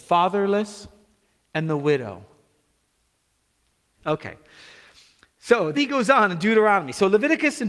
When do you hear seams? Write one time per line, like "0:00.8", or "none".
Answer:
0:04.0
0:05.7